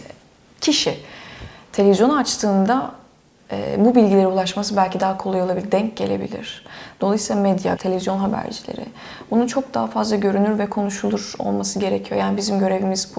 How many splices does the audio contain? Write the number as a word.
one